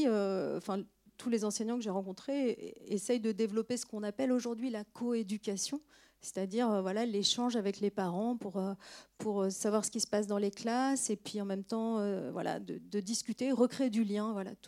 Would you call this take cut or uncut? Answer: uncut